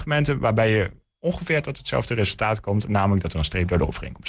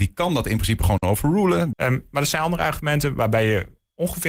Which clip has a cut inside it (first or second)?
second